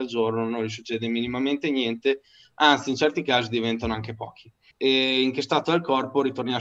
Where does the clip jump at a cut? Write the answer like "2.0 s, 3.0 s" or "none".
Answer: 4.7 s